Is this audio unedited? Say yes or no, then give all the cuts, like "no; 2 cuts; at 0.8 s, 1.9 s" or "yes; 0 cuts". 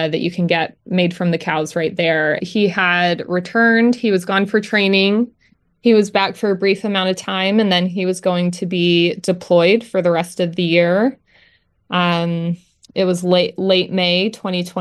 no; 1 cut; at 2.4 s